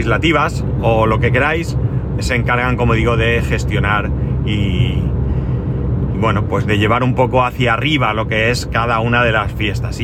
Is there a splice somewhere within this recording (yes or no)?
yes